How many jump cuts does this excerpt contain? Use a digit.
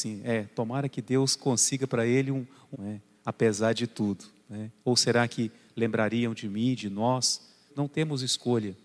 3